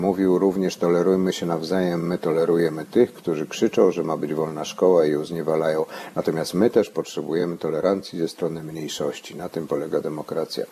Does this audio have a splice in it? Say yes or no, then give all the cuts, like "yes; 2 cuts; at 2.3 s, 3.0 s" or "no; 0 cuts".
no; 0 cuts